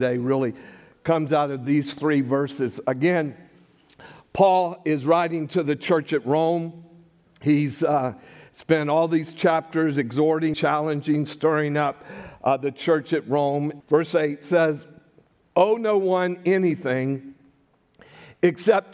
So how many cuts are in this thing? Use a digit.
2